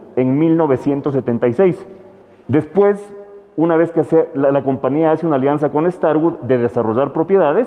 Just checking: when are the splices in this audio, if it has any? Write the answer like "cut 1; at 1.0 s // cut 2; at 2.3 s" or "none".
cut 1; at 2.4 s